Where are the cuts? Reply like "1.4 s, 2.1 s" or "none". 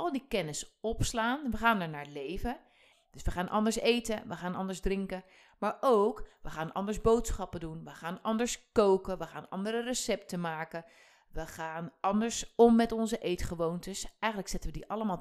2.9 s